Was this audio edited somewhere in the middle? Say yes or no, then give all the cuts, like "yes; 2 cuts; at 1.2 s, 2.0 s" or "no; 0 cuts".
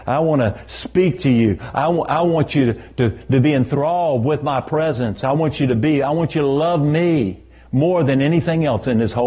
no; 0 cuts